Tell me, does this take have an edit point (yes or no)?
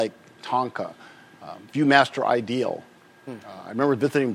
no